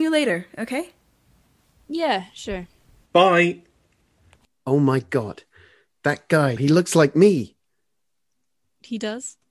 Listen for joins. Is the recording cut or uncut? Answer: cut